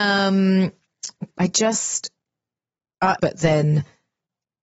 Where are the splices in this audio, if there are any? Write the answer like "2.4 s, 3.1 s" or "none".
1.3 s, 3.2 s

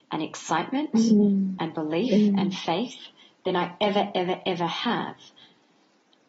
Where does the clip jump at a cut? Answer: none

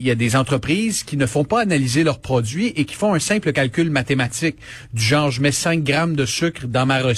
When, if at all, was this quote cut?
none

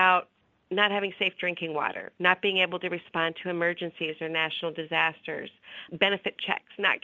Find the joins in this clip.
none

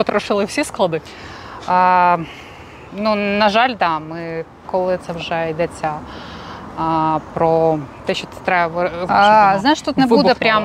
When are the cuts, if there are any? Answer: 4.6 s, 9.1 s

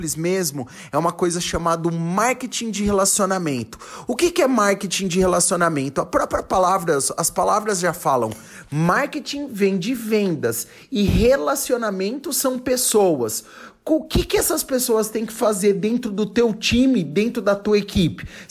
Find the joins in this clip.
none

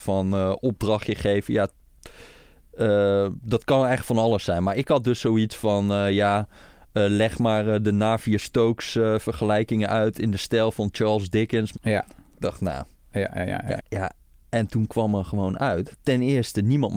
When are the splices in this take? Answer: 11.7 s, 13.8 s, 15.9 s

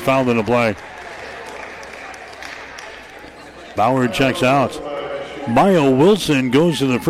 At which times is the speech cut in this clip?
3.8 s

